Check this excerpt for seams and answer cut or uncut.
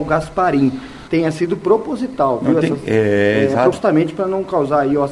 cut